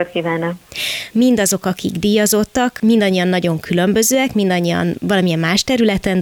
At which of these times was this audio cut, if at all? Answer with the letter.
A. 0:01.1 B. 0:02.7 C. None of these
A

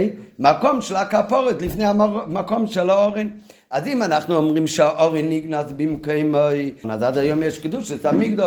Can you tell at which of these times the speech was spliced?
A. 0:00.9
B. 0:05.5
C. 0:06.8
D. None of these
C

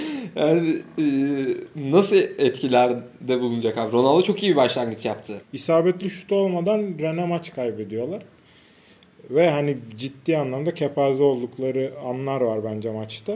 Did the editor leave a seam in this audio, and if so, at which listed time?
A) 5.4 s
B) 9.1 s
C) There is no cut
A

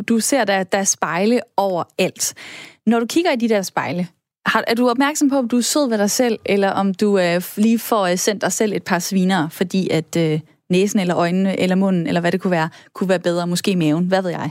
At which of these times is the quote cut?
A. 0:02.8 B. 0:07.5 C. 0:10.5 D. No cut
D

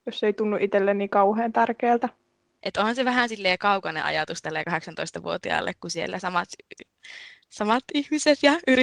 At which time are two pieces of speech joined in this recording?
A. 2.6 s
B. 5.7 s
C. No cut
A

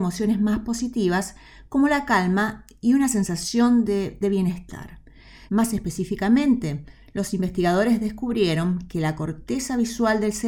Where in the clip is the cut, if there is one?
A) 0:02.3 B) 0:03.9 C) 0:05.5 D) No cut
C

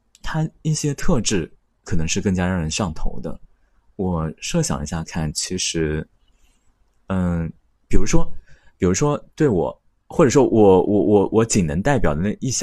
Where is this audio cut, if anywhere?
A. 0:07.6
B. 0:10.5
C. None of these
C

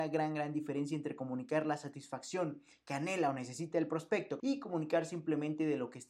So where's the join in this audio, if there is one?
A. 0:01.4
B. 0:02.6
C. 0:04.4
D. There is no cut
C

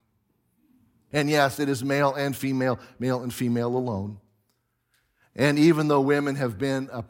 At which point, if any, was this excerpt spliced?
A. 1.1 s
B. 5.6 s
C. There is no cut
A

